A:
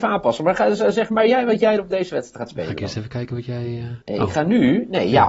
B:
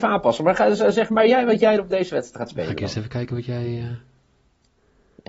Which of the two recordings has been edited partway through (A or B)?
A